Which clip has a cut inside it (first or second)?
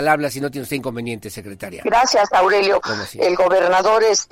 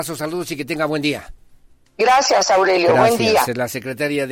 first